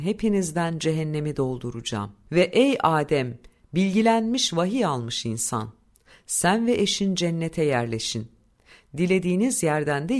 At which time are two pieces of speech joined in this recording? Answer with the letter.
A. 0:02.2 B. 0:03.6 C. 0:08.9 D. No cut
D